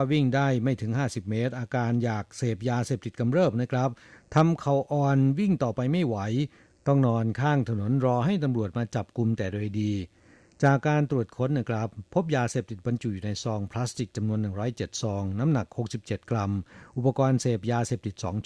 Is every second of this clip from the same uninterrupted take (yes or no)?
yes